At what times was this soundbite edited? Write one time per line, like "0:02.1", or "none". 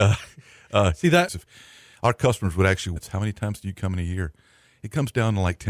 0:01.3
0:03.0

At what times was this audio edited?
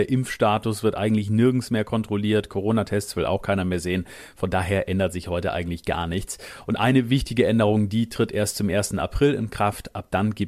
none

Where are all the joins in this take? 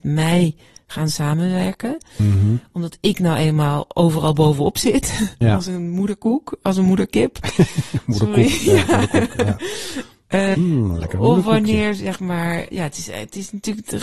0:10.5
0:12.7

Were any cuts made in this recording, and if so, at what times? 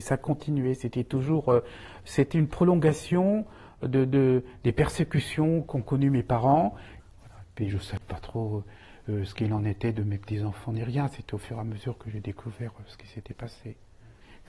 0:07.0

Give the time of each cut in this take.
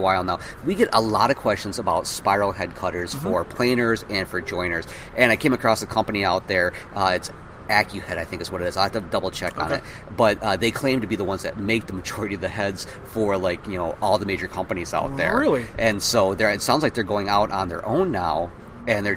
none

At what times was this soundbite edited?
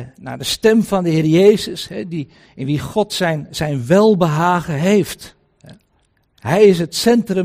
none

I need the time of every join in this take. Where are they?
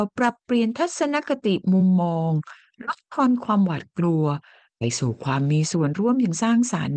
none

